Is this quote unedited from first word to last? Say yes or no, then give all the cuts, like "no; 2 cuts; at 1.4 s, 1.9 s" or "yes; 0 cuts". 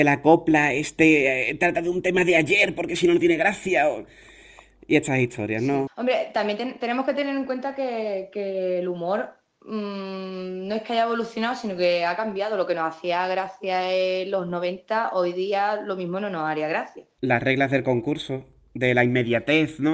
no; 2 cuts; at 5.9 s, 17.2 s